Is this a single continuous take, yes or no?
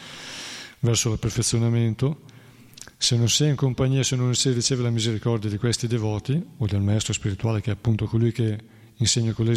yes